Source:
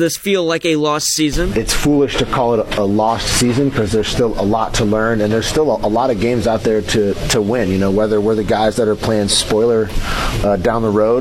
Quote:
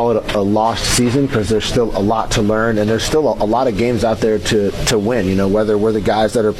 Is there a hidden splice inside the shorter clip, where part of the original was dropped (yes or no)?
no